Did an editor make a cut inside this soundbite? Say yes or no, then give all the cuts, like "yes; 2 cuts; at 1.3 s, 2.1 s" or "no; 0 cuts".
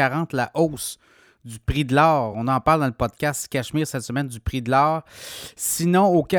no; 0 cuts